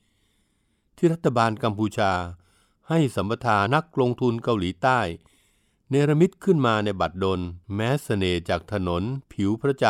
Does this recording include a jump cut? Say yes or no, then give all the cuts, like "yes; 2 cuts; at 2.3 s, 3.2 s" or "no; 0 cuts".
yes; 2 cuts; at 3.7 s, 7.6 s